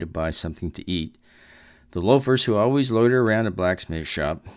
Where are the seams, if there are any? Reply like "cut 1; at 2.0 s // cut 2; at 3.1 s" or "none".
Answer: none